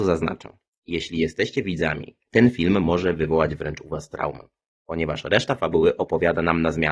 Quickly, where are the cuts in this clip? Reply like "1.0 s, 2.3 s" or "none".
2.2 s